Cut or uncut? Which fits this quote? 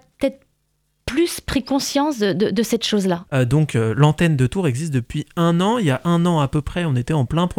cut